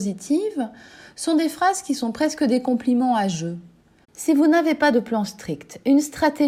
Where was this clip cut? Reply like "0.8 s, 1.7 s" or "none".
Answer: 4.0 s